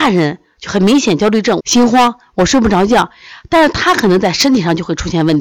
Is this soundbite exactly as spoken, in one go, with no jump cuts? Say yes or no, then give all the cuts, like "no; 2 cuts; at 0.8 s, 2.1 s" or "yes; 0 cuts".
no; 1 cut; at 1.6 s